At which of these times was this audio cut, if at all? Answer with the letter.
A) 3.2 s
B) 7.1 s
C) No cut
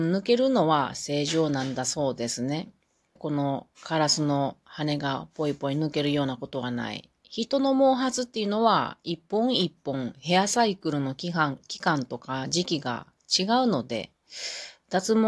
A